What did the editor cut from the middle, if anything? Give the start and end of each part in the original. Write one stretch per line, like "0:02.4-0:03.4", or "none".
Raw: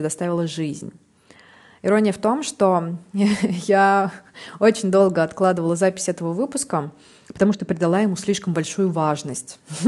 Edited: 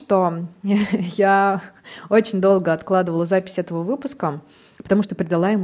none